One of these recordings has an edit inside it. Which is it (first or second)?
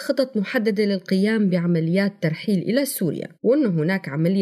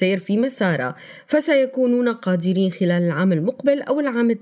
first